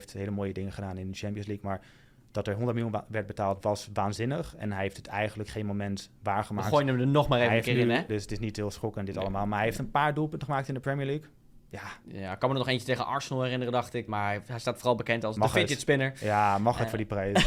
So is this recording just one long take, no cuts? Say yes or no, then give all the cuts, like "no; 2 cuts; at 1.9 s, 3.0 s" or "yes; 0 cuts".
no; 2 cuts; at 8.1 s, 14.1 s